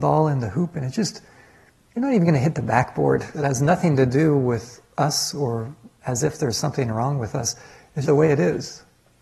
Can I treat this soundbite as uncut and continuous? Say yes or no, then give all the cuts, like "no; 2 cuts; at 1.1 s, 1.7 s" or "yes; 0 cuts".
no; 2 cuts; at 3.3 s, 8.0 s